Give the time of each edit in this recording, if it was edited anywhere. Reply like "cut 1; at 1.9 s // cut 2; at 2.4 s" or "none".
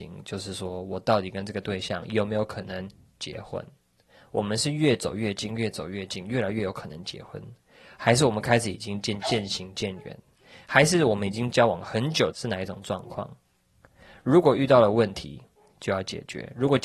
cut 1; at 9.2 s // cut 2; at 12.3 s